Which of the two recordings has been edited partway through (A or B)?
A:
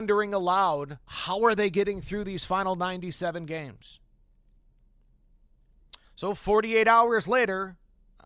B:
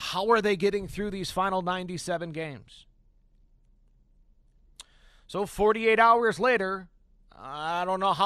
A